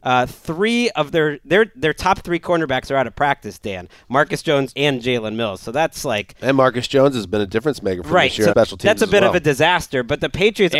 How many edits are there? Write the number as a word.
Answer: two